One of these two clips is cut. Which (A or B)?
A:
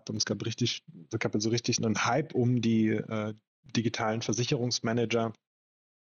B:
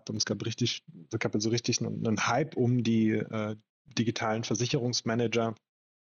A